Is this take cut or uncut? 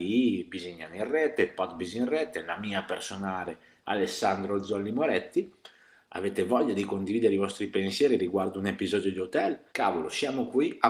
cut